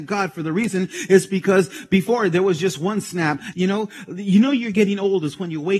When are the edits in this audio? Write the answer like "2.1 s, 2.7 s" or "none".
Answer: 3.5 s